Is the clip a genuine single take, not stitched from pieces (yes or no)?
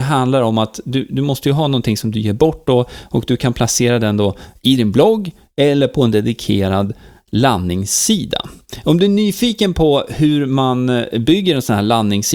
yes